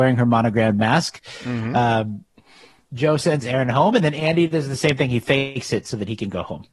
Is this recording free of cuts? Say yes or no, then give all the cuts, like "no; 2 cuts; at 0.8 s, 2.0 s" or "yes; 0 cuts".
no; 1 cut; at 2.3 s